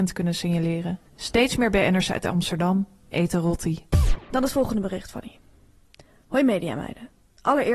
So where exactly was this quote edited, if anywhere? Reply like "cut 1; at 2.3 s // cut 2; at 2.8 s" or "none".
cut 1; at 1.1 s